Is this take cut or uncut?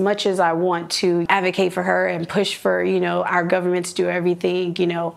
uncut